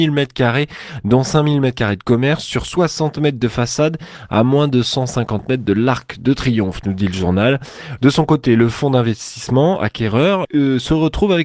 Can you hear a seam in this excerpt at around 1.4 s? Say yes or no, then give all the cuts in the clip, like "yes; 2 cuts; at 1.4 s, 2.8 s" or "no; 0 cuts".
no; 2 cuts; at 8.0 s, 10.4 s